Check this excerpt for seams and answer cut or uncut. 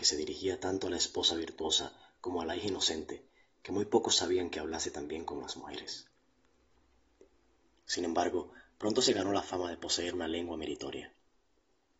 uncut